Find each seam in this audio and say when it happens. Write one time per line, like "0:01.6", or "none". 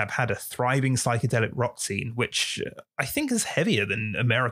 none